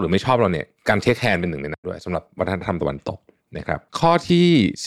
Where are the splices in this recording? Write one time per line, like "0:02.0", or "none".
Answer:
0:03.9

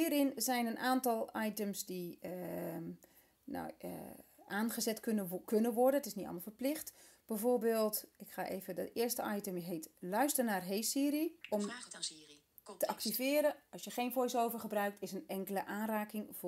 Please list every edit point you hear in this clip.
0:11.4

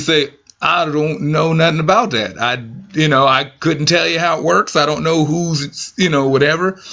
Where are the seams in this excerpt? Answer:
none

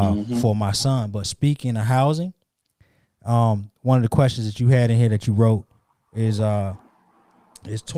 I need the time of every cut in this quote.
none

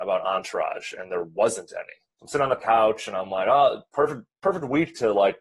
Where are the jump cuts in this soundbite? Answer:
0:02.1

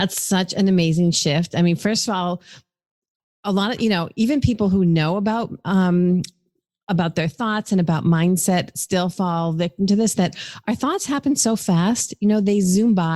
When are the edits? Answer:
none

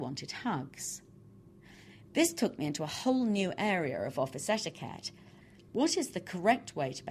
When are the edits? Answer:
0:02.1

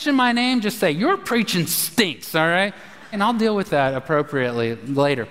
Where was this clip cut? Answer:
0:03.1

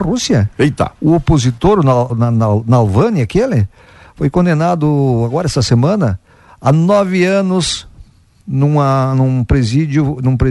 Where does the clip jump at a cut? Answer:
none

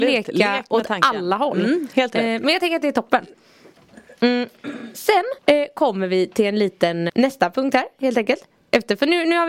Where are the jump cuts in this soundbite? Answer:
0:05.4
0:07.1

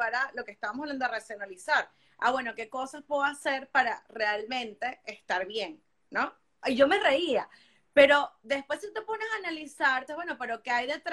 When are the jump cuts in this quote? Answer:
0:06.6
0:10.1

